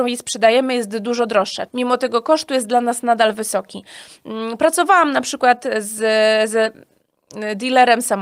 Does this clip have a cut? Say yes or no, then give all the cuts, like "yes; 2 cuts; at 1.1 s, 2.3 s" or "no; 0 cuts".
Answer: yes; 1 cut; at 1.7 s